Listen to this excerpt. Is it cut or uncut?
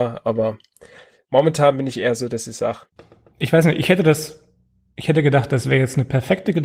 uncut